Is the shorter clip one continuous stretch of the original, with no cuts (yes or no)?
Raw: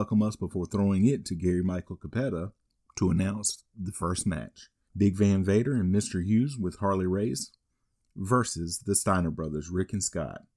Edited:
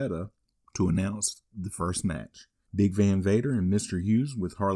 yes